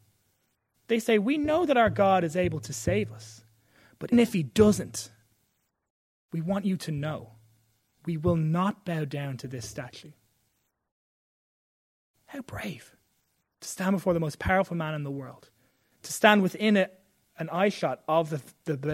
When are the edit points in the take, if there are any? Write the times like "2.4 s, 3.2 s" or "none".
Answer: 4.1 s

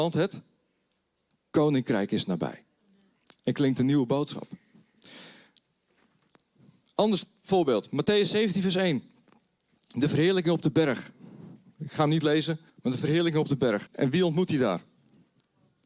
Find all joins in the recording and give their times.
12.7 s, 13.9 s

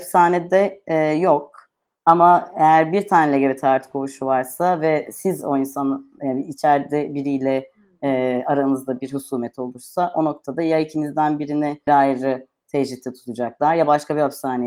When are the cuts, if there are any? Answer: 1.9 s, 11.9 s

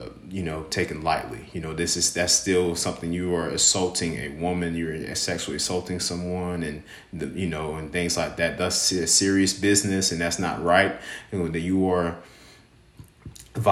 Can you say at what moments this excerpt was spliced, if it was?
none

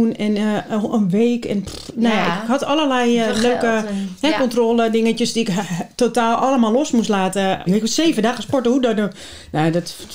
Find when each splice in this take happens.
7.7 s

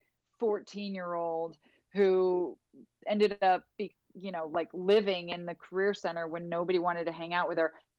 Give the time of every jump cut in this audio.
3.7 s

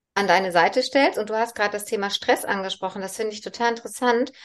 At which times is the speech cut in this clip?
none

